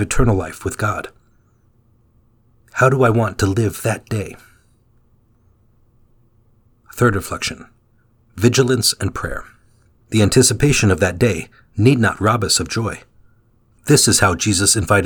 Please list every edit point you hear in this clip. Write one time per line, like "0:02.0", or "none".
0:10.0
0:13.7

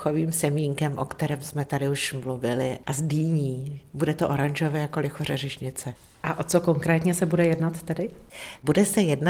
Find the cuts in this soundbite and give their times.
0:02.8

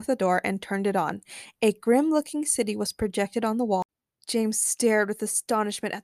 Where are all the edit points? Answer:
none

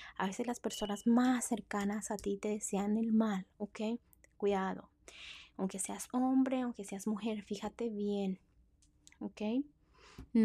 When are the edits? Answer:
none

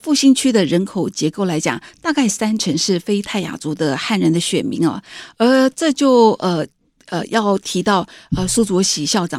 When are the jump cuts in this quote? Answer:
none

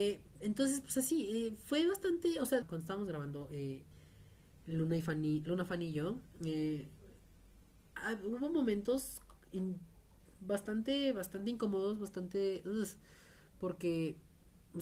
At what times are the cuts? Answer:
0:02.6

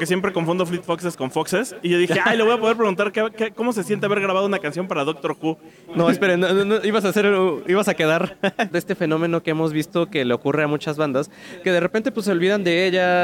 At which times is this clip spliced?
0:05.9
0:08.7

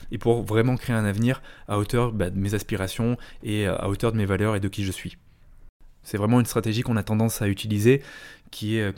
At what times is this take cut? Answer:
0:06.0

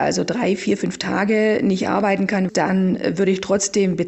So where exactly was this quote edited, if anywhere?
0:02.5

